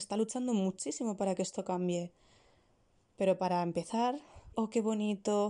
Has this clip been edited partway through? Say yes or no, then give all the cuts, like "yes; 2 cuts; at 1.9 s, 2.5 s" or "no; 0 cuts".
yes; 1 cut; at 4.5 s